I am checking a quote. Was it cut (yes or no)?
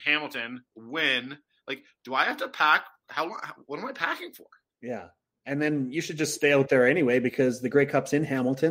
yes